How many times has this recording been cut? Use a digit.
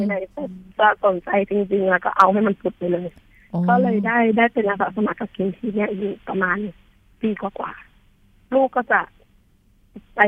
0